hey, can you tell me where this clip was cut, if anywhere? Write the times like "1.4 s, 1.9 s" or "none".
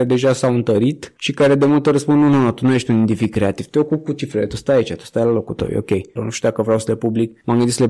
6.2 s